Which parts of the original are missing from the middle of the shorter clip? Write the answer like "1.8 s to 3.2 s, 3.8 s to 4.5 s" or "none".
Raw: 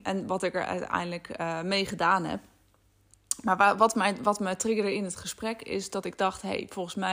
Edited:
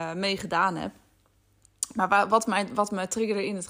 none